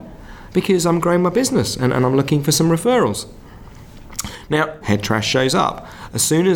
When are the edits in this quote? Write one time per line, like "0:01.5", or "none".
0:04.8